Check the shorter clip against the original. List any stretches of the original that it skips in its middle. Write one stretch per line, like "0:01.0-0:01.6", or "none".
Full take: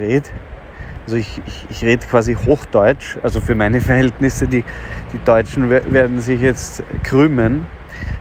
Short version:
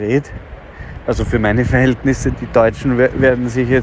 0:01.0-0:03.2
0:04.5-0:05.1

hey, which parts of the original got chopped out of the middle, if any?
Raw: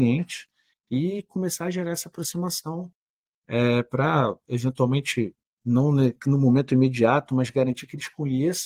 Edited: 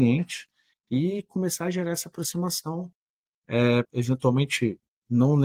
0:03.8-0:04.4

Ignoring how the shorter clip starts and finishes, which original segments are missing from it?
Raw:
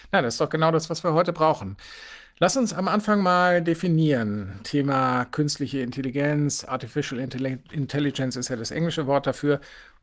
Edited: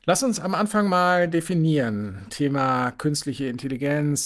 none

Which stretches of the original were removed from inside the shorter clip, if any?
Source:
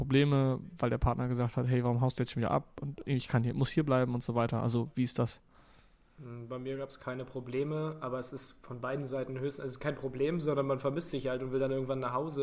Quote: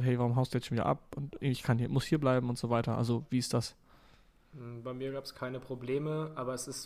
none

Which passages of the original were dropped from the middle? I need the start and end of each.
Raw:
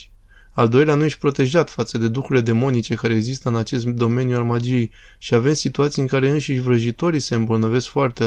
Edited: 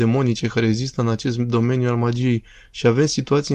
none

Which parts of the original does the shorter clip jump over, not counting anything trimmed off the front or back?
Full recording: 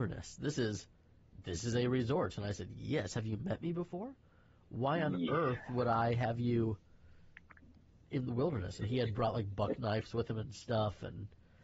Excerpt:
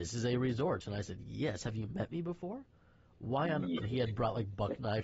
0:05.3-0:08.8

